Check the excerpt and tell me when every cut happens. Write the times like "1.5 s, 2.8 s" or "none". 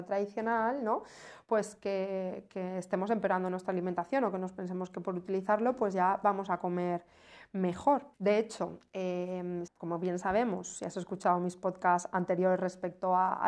8.1 s, 9.7 s